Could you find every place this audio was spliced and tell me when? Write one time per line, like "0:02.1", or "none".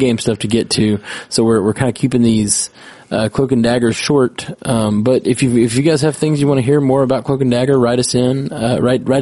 none